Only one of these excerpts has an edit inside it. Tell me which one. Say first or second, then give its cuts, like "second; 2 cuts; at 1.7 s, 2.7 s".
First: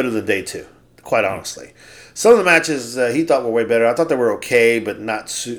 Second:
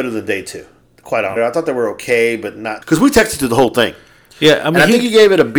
second; 2 cuts; at 1.4 s, 2.8 s